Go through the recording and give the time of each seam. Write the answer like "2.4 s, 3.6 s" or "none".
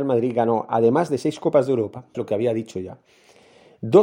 2.1 s

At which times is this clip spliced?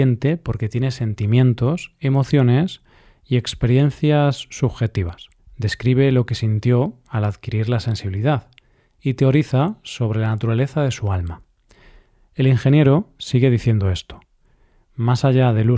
5.4 s

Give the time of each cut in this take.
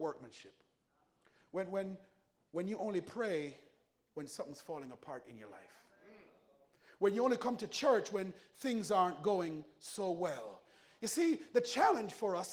none

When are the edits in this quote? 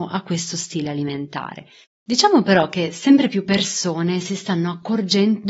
1.8 s

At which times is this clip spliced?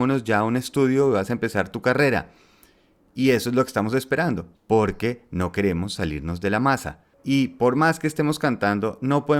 4.6 s, 7.1 s

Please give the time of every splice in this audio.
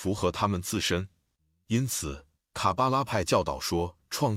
none

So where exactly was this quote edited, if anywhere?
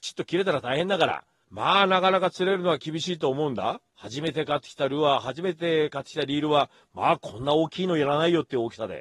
1.4 s, 3.9 s

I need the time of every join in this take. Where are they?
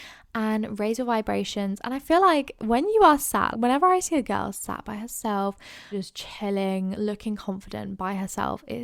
3.5 s, 5.9 s, 6.9 s

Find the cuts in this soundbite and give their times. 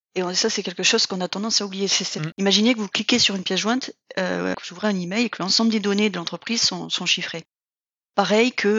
2.3 s, 4.5 s

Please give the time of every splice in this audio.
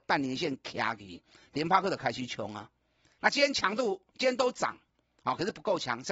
3.2 s

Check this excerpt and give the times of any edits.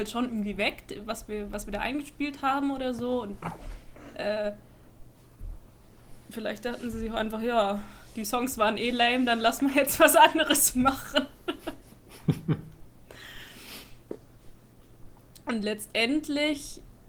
none

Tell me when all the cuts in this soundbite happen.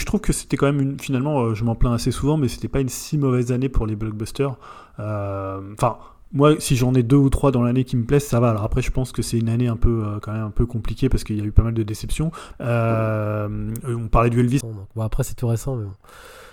12.5 s, 14.6 s

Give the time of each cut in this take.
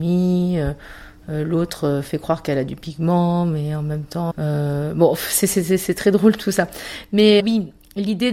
4.3 s, 7.4 s

